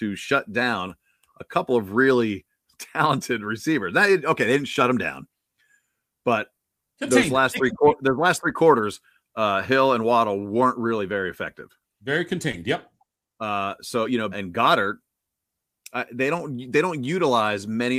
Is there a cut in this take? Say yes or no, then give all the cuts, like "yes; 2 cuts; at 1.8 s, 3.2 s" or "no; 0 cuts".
yes; 1 cut; at 14.3 s